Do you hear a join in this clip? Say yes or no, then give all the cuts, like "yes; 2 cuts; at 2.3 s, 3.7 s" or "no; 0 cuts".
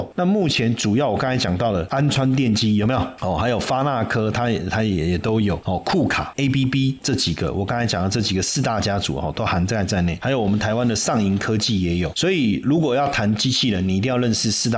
no; 0 cuts